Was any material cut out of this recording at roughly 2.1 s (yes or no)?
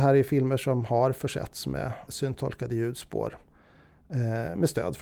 yes